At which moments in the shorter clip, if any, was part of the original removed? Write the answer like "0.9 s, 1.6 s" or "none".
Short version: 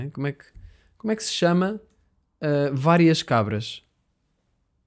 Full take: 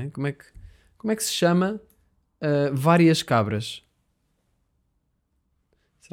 none